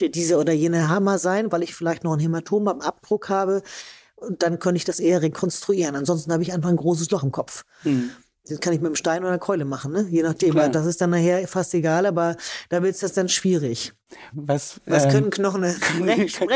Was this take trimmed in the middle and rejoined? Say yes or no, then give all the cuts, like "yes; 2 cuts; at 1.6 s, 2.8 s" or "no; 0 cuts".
yes; 1 cut; at 14.3 s